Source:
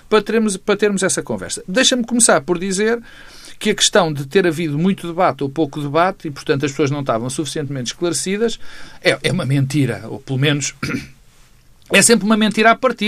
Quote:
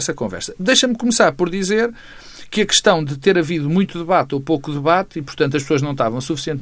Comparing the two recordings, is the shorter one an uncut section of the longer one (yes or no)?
yes